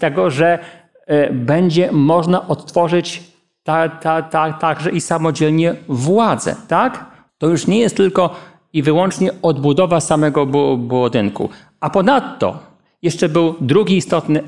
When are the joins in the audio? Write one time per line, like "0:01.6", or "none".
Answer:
0:07.3